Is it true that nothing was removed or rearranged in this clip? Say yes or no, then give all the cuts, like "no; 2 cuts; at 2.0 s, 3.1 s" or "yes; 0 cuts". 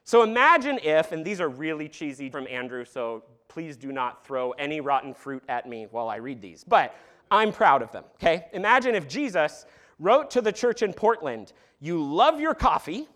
no; 1 cut; at 2.3 s